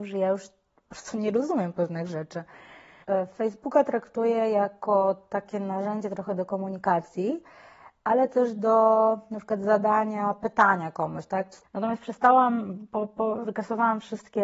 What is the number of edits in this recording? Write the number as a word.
two